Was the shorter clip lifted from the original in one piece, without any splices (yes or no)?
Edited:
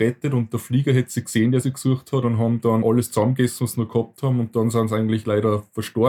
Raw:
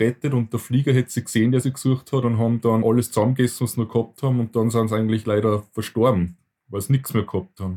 yes